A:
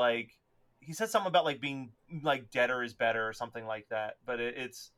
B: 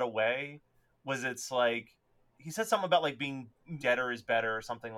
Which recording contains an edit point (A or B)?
B